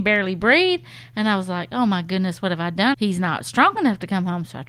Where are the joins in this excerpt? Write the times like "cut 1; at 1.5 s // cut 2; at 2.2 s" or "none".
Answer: cut 1; at 2.9 s